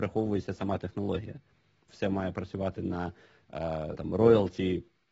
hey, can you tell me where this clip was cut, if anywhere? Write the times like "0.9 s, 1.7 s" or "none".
1.9 s, 4.0 s

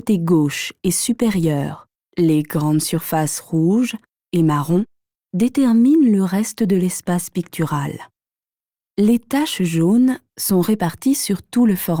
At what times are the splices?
none

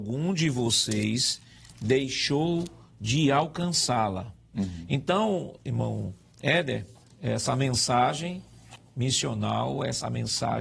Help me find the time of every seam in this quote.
4.5 s, 5.6 s, 7.0 s

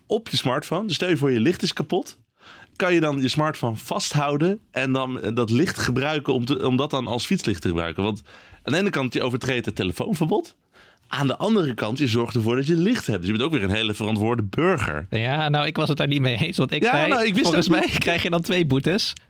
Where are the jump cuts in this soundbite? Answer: none

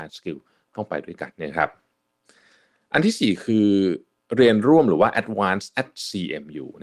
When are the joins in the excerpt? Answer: 1.3 s

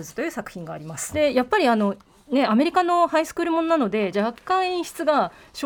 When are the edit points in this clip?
1.1 s, 4.1 s

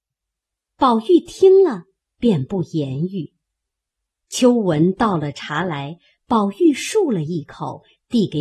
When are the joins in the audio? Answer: none

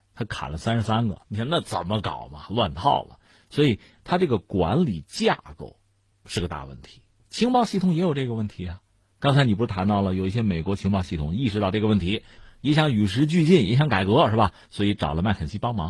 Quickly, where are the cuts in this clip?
1.2 s

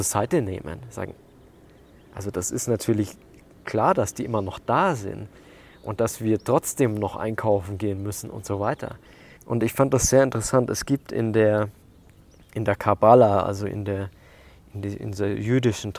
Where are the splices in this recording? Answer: 9.4 s

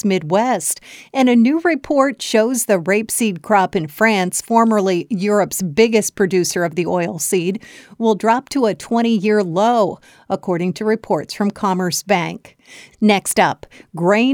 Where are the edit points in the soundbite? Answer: 12.9 s

